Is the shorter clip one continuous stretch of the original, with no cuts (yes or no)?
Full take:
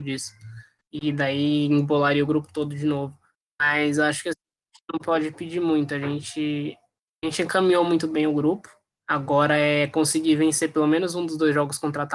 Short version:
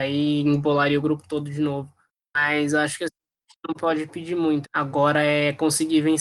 no